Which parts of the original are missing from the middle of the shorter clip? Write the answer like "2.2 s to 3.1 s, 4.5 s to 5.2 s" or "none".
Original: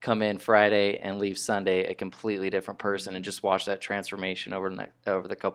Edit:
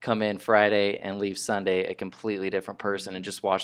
none